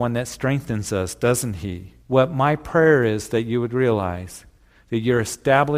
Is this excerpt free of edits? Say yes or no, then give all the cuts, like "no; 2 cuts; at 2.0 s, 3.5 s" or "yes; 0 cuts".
no; 1 cut; at 2.0 s